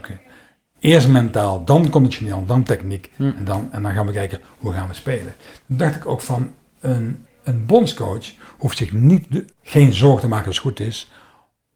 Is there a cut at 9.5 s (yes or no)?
yes